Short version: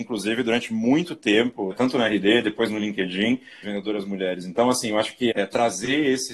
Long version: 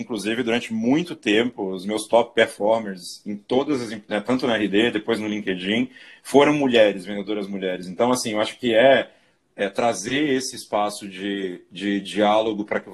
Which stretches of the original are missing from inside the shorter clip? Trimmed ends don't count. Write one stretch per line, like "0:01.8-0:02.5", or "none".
0:01.7-0:04.2
0:06.1-0:07.0
0:08.7-0:09.5